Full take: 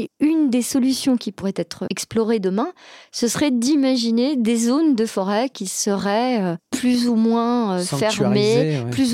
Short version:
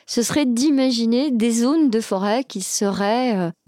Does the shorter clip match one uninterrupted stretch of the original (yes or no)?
yes